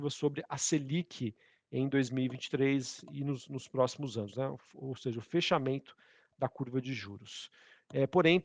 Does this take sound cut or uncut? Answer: uncut